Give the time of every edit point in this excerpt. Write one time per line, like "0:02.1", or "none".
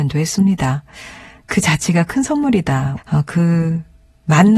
0:03.0